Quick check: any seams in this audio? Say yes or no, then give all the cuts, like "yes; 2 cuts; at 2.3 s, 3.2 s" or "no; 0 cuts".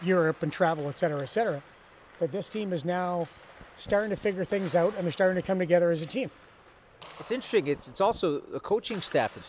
no; 0 cuts